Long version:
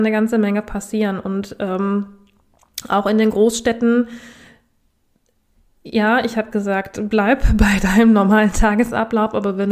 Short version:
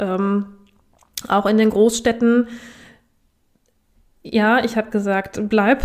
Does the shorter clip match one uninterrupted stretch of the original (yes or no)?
yes